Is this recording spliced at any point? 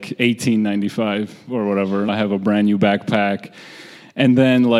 yes; 1 cut; at 2.1 s

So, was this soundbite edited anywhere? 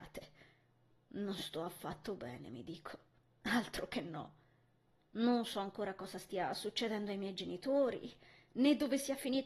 no; 0 cuts

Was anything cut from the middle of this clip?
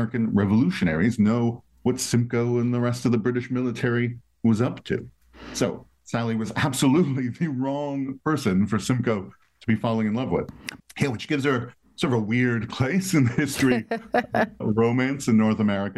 yes; 2 cuts; at 10.8 s, 14.6 s

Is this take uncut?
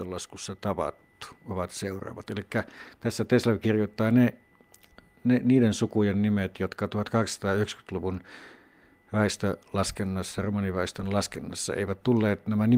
yes; 0 cuts

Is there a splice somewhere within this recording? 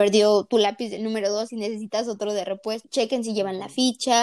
yes; 1 cut; at 2.8 s

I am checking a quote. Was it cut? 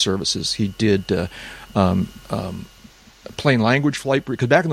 no; 0 cuts

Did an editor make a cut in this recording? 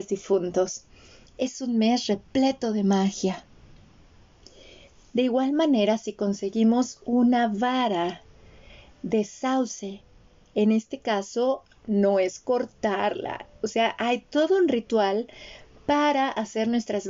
no; 0 cuts

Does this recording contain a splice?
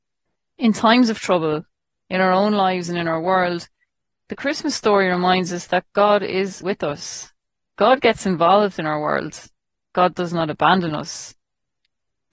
yes; 1 cut; at 6.6 s

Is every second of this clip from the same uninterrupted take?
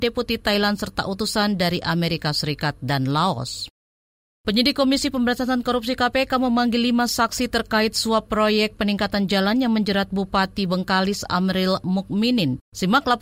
yes; 0 cuts

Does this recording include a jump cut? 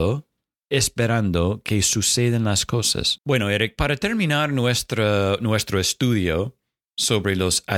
yes; 1 cut; at 3.2 s

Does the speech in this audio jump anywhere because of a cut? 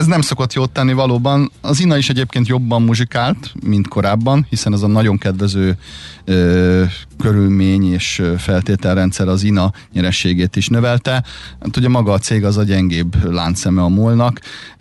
no; 0 cuts

